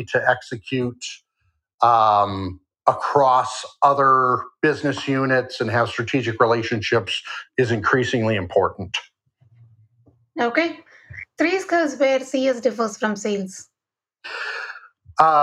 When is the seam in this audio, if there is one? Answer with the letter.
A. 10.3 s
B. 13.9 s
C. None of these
C